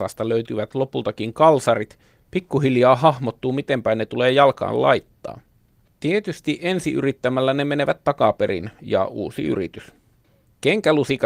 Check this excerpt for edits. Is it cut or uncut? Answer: uncut